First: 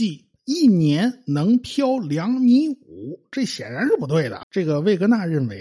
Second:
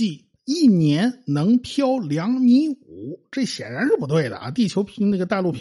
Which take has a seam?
first; 1 cut; at 4.4 s

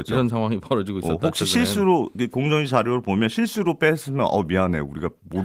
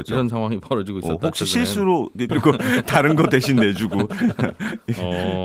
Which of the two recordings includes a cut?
second; 1 cut; at 2.3 s

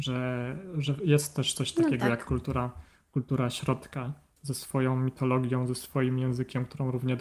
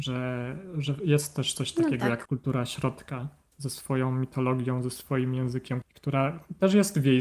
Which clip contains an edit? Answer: second; 2 cuts; at 2.3 s, 5.8 s

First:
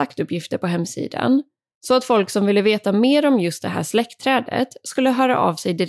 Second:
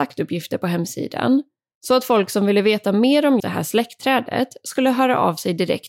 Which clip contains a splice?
second; 1 cut; at 3.4 s

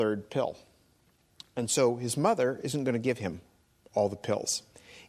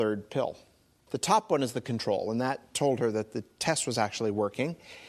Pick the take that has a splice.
second; 1 cut; at 1.1 s

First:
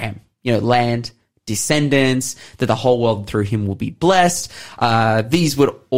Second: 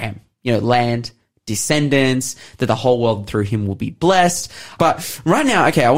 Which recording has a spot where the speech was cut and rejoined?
second; 1 cut; at 4.8 s

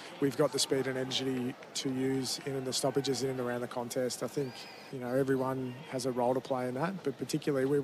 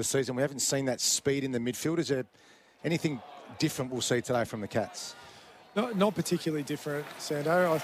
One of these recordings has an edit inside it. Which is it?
first; 1 cut; at 4.9 s

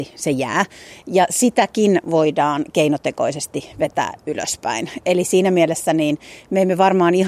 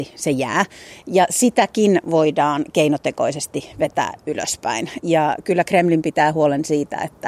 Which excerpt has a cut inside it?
second; 1 cut; at 5.0 s

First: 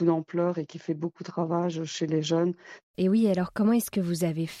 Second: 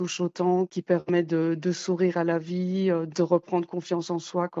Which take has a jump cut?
first; 1 cut; at 2.8 s

